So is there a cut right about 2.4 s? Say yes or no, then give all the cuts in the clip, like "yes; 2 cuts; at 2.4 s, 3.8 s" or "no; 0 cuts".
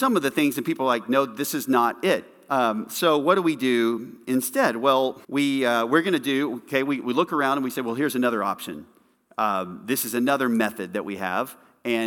no; 1 cut; at 5.2 s